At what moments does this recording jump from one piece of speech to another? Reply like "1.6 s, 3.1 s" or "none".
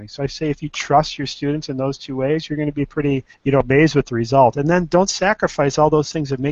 3.3 s